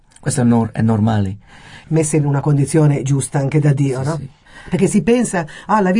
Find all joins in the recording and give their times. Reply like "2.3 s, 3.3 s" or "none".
1.8 s